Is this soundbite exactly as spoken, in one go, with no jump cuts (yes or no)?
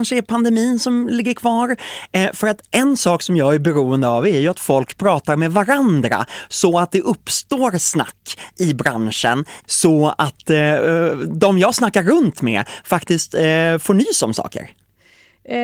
no